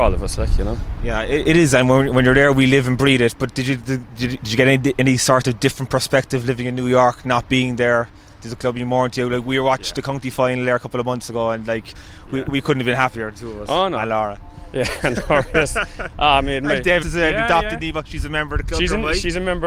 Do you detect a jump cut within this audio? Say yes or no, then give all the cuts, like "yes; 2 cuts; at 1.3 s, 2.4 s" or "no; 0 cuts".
yes; 1 cut; at 17.0 s